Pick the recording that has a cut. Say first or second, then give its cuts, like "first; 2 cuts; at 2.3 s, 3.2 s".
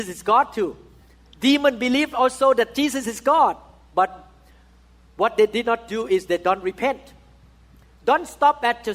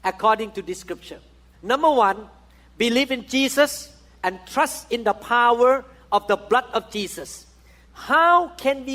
second; 2 cuts; at 1.5 s, 7.9 s